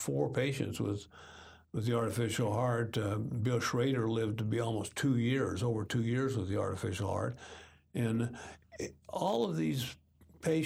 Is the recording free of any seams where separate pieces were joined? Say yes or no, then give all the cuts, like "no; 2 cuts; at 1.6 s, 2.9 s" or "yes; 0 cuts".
yes; 0 cuts